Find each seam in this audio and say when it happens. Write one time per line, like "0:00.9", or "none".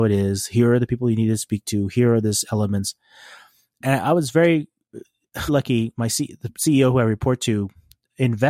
0:05.5